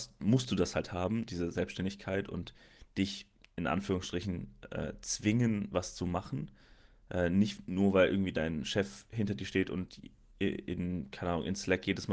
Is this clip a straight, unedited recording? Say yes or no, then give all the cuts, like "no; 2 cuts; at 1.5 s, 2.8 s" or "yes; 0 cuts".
yes; 0 cuts